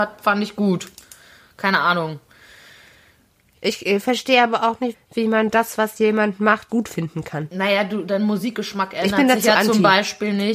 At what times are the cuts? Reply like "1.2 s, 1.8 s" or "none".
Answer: 4.9 s, 6.7 s